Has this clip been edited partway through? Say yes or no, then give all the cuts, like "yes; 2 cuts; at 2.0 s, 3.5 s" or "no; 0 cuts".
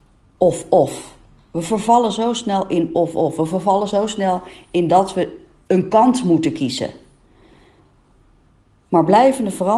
no; 0 cuts